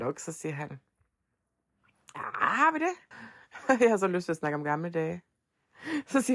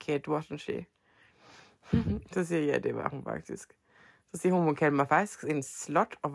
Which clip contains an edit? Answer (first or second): first